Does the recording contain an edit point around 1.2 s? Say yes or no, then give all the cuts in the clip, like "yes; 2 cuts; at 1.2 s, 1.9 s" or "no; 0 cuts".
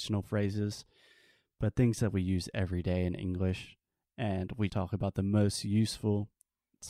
no; 1 cut; at 4.7 s